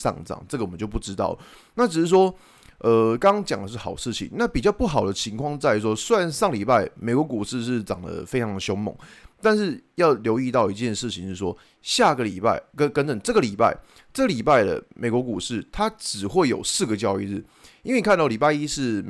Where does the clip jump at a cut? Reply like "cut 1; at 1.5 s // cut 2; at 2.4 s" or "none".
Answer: none